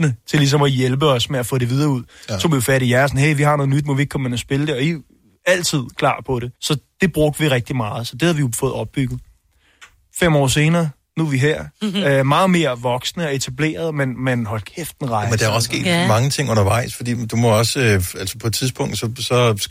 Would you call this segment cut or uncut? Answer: cut